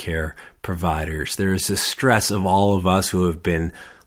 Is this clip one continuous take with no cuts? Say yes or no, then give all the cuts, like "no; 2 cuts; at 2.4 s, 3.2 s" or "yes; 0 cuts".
yes; 0 cuts